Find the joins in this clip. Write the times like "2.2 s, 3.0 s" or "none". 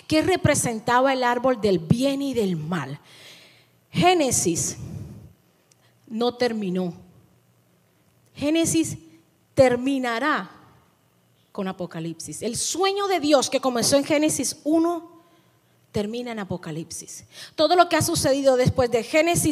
none

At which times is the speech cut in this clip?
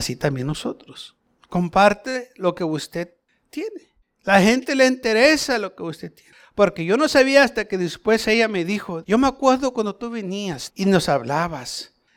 9.0 s, 10.7 s

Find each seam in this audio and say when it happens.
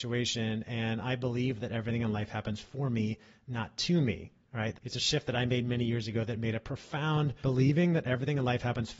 4.7 s, 7.4 s

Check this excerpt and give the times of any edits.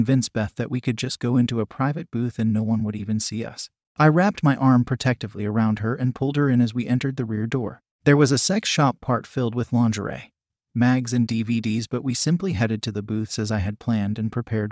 3.8 s, 10.7 s

